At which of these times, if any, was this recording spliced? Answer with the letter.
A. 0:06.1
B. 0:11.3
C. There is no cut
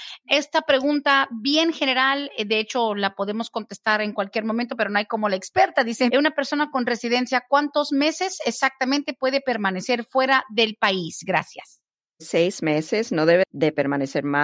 A